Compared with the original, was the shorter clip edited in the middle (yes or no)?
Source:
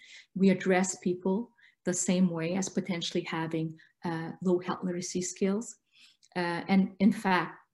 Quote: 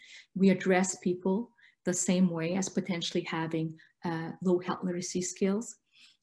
no